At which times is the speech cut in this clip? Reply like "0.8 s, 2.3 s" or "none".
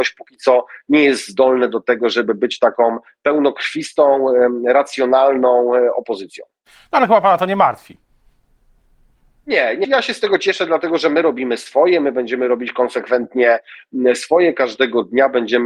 9.8 s